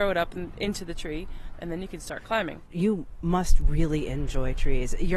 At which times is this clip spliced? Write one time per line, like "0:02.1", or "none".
0:01.5